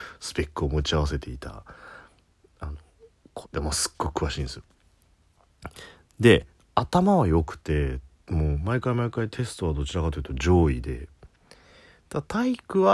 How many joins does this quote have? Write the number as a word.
one